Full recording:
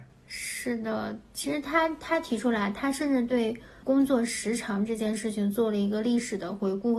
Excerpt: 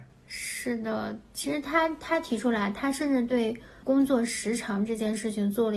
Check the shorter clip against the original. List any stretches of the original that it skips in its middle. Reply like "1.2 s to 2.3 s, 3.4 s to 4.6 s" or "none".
none